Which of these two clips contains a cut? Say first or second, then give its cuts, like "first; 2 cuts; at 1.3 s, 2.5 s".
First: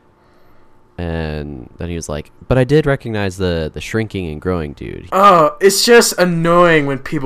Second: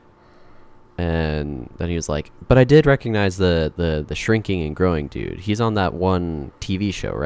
first; 2 cuts; at 3.7 s, 5.1 s